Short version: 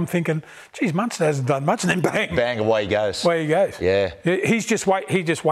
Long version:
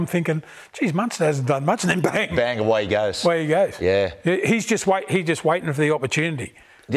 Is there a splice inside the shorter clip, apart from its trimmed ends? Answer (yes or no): no